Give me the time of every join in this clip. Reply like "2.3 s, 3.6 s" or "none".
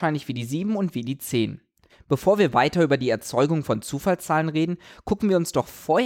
1.9 s